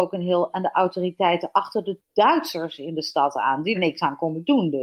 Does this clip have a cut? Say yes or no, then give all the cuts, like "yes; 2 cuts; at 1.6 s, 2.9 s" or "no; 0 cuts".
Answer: yes; 1 cut; at 3.7 s